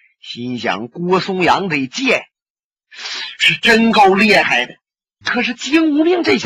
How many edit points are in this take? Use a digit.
1